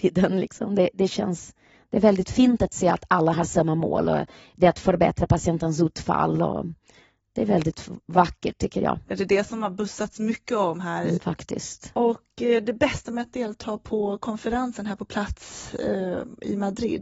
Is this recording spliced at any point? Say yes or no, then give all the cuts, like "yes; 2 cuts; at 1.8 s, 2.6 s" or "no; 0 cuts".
yes; 2 cuts; at 9.0 s, 11.2 s